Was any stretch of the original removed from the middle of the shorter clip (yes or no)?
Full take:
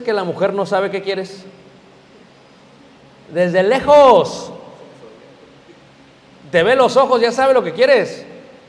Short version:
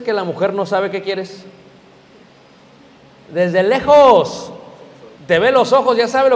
yes